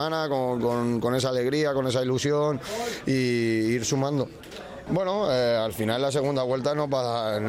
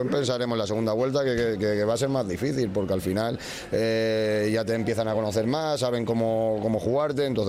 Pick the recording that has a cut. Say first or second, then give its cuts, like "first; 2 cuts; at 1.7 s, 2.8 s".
first; 1 cut; at 4.9 s